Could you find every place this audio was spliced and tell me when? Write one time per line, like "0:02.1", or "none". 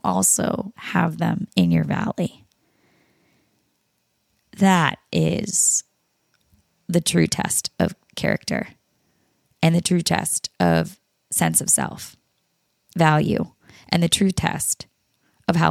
0:12.9